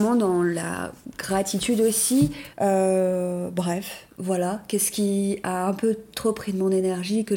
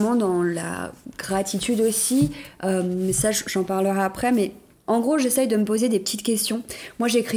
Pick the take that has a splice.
first; 1 cut; at 2.5 s

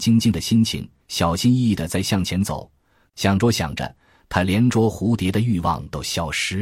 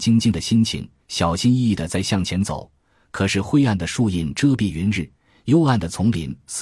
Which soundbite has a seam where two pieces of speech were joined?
first; 1 cut; at 3.1 s

